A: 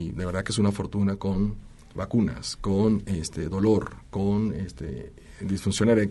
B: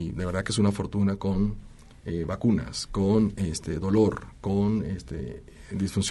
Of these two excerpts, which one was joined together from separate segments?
A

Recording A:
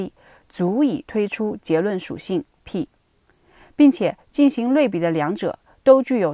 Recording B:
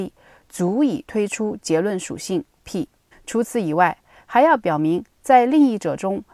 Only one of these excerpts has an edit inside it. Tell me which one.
B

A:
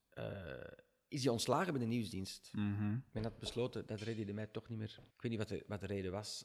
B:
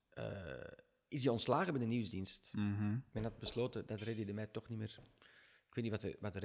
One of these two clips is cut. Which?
A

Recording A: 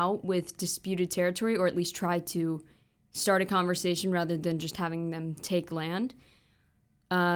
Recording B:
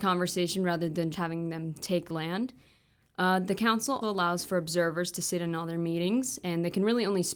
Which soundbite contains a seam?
B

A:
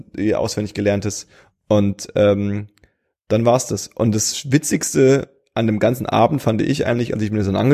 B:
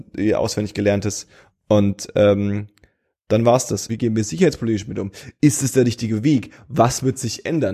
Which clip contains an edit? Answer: B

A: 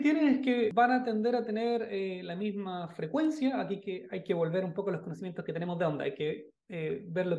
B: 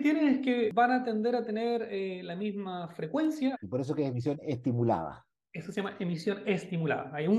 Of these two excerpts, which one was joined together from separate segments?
B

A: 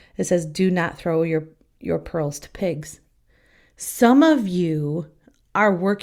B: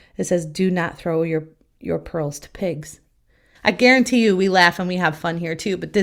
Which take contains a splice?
B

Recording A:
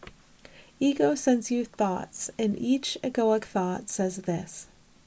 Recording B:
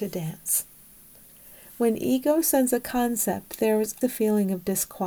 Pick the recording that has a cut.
B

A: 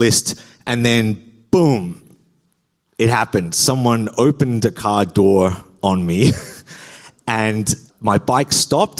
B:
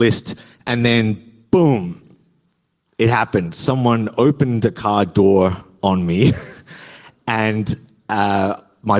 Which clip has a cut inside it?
A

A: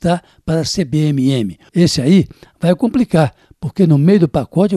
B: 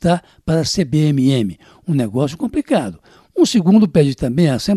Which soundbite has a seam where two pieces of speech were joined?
A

